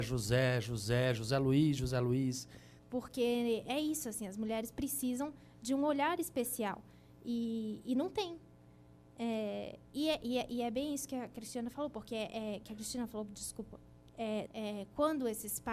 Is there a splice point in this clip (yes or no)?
yes